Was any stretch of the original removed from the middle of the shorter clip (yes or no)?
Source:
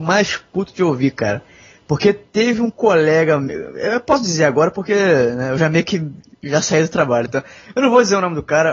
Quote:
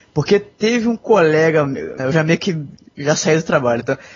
yes